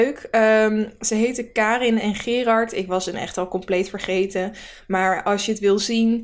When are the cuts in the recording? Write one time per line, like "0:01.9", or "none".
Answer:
none